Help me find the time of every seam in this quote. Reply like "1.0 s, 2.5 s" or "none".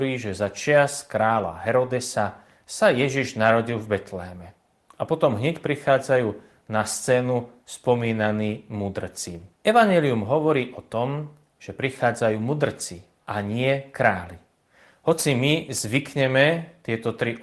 9.5 s